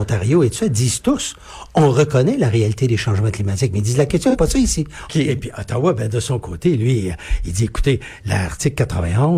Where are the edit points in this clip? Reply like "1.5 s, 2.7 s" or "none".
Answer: 5.1 s